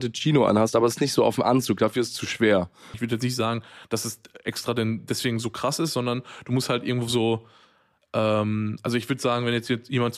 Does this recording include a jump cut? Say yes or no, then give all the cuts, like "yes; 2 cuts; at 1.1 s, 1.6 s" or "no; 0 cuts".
yes; 1 cut; at 2.9 s